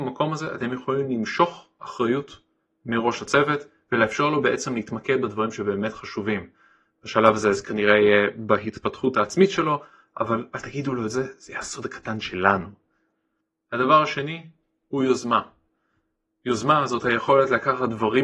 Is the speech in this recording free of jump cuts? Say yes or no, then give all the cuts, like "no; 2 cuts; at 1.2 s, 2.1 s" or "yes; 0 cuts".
yes; 0 cuts